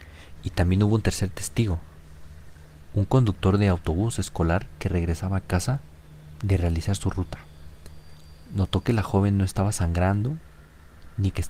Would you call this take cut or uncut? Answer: uncut